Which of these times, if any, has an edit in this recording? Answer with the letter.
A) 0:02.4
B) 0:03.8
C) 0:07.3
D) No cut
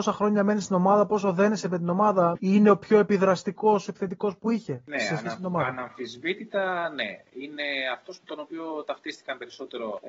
A